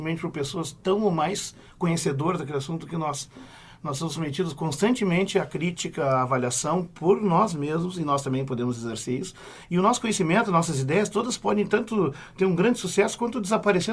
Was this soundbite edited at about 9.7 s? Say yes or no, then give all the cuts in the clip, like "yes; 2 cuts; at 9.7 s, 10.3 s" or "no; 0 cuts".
no; 0 cuts